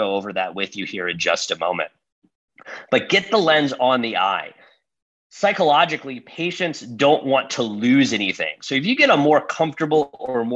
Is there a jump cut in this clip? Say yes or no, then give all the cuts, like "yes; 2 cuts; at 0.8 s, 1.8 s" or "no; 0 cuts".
no; 0 cuts